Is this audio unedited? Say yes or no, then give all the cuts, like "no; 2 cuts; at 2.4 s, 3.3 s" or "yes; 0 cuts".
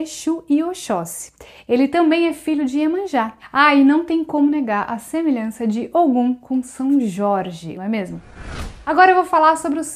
no; 1 cut; at 7.8 s